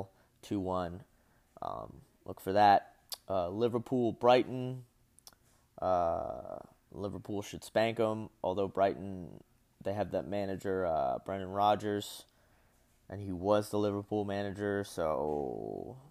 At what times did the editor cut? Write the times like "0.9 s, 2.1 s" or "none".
none